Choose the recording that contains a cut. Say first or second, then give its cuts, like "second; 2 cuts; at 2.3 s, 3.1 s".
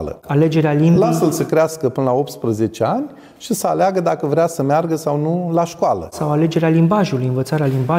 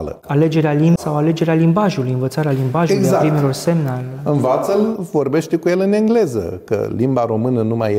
second; 1 cut; at 1.0 s